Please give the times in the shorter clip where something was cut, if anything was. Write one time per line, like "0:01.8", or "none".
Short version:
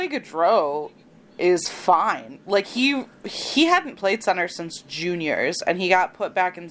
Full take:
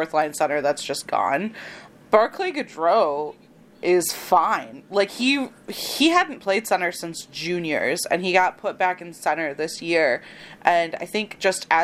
none

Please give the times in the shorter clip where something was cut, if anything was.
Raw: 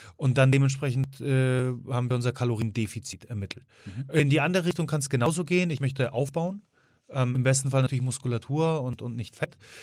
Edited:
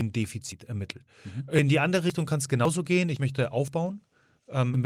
none

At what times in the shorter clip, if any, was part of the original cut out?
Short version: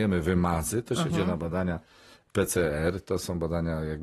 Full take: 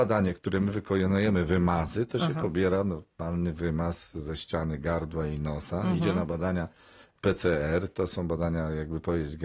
0:01.1

